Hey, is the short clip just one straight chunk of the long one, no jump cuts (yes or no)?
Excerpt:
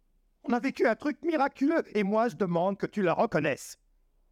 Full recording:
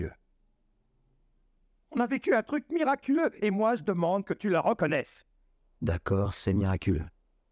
yes